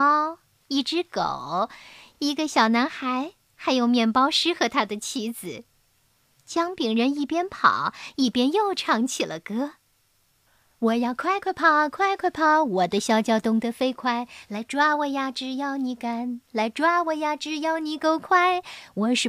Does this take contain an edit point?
no; 0 cuts

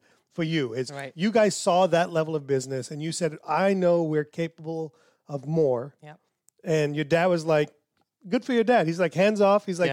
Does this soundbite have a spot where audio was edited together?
no; 0 cuts

